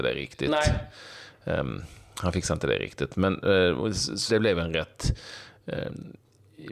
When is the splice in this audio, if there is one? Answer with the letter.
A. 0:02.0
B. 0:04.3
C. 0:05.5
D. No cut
B